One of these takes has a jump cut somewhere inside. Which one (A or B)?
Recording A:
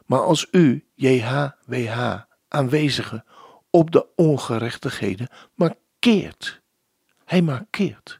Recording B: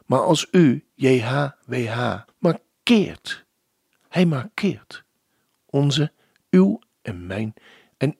B